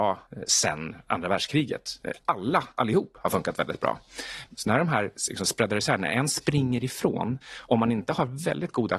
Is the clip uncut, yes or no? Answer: no